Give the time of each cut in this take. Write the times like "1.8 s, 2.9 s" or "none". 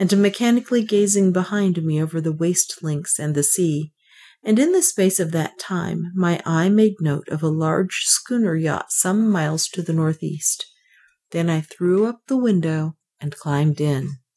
none